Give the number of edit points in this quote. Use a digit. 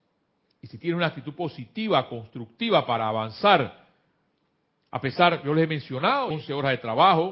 1